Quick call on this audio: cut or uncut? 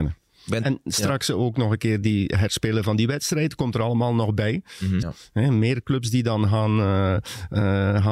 cut